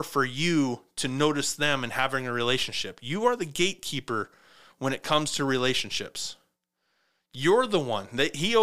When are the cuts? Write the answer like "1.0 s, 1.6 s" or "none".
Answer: none